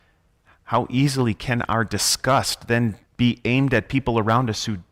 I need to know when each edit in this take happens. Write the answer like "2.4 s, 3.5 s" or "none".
3.1 s